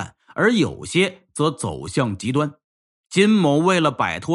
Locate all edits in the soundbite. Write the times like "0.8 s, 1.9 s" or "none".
none